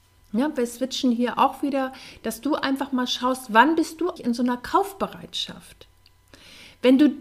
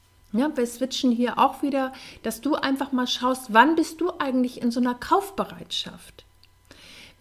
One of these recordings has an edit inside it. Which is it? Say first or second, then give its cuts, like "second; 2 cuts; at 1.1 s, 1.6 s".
first; 1 cut; at 4.2 s